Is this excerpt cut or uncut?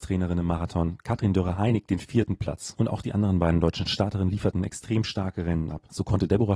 uncut